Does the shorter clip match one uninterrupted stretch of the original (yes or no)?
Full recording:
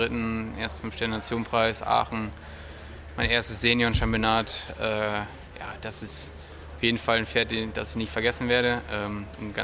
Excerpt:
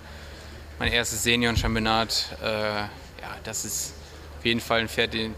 yes